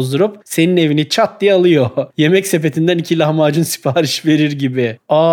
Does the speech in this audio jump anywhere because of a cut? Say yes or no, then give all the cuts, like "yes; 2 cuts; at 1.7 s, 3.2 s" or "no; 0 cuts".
no; 0 cuts